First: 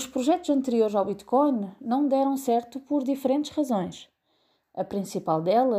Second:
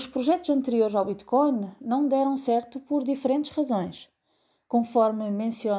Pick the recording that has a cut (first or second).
second